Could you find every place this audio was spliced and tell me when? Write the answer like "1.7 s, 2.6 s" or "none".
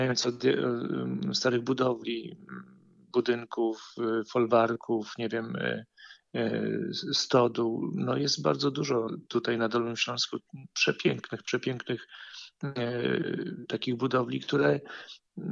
none